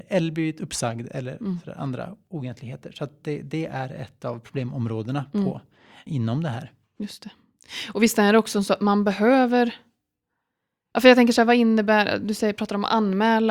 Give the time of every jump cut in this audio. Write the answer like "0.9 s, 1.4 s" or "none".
6.1 s